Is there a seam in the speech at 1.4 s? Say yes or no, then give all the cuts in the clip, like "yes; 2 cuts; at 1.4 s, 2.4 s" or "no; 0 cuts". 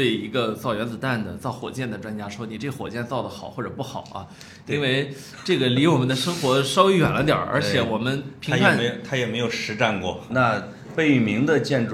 no; 1 cut; at 10.3 s